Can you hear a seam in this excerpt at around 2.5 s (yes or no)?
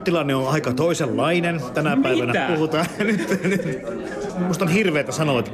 no